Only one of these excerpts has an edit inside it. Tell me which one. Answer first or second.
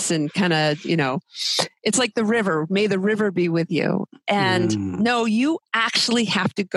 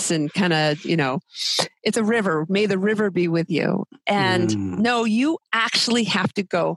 second